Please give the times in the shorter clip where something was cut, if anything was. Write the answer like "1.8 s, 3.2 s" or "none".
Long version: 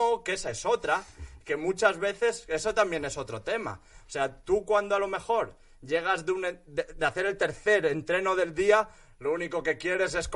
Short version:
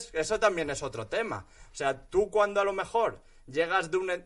none